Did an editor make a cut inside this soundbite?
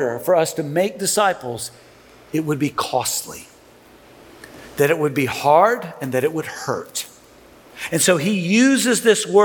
no; 0 cuts

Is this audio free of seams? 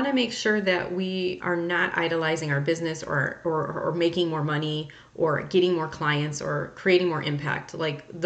no; 1 cut; at 1.4 s

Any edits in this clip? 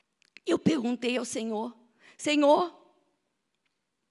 no; 0 cuts

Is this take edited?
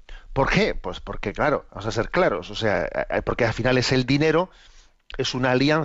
yes; 1 cut; at 1.7 s

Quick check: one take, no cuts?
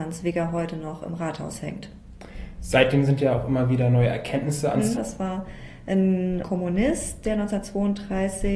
no; 2 cuts; at 5.0 s, 6.4 s

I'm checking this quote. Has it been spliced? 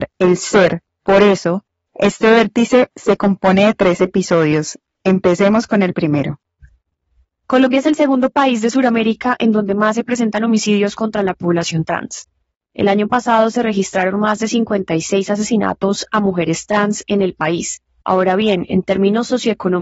yes; 1 cut; at 18.0 s

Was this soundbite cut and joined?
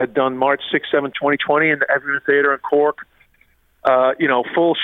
yes; 1 cut; at 1.1 s

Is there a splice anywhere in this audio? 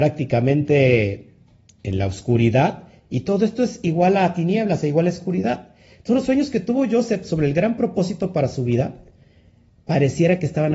no; 0 cuts

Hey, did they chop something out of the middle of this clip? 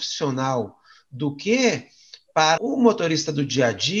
yes; 1 cut; at 2.6 s

